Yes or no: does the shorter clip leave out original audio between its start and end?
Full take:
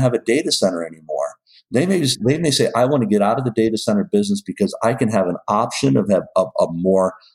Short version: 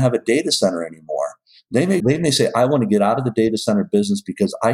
yes